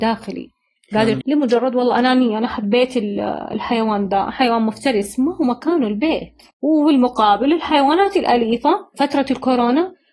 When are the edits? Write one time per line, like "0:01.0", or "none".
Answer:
0:01.2
0:06.5